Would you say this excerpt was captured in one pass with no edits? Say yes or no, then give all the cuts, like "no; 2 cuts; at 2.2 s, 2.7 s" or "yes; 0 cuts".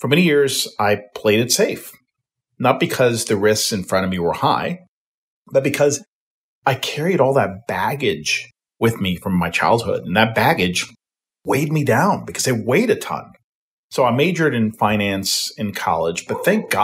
yes; 0 cuts